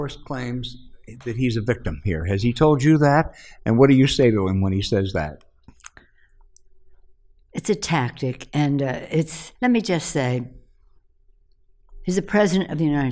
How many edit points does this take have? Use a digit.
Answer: 2